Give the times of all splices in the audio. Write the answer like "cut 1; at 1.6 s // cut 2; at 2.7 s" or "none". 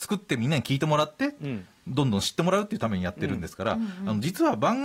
none